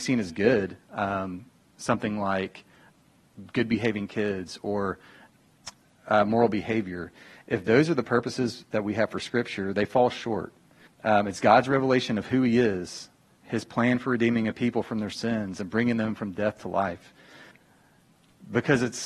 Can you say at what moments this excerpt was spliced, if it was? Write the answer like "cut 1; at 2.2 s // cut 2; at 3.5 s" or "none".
cut 1; at 10.9 s